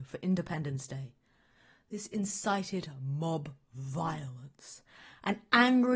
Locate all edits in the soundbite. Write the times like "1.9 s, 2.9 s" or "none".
none

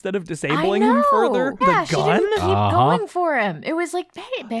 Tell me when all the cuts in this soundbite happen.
1.6 s

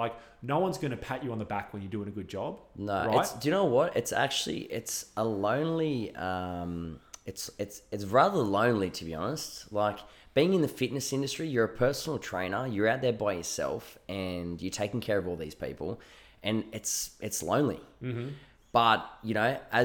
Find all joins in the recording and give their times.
none

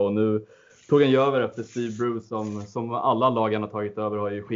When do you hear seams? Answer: none

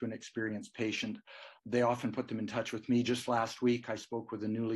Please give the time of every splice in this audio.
1.6 s

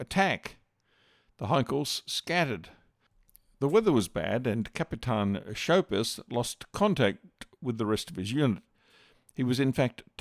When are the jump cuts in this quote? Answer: none

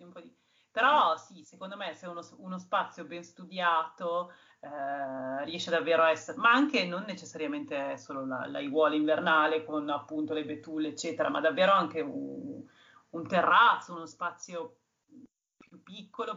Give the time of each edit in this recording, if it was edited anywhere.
none

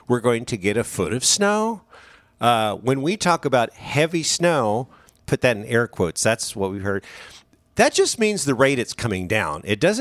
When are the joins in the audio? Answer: 5.3 s

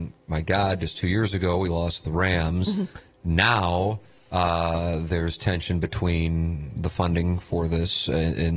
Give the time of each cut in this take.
none

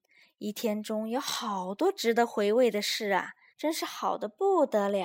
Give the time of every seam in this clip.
3.5 s

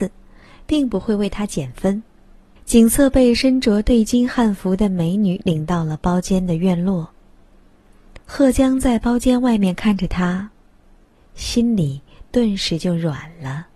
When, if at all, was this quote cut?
2.6 s, 8.2 s

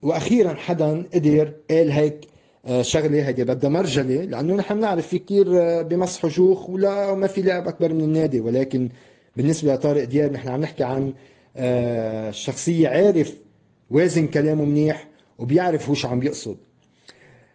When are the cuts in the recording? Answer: none

